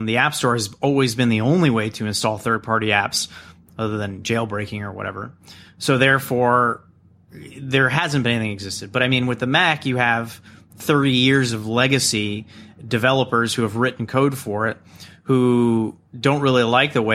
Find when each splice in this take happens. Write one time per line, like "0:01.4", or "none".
0:16.1